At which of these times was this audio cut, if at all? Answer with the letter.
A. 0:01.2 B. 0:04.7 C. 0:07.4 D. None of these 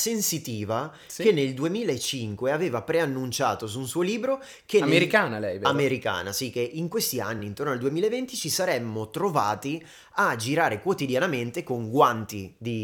D